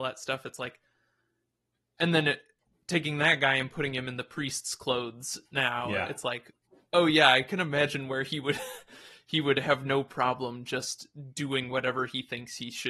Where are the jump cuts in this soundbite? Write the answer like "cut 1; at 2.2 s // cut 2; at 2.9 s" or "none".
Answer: none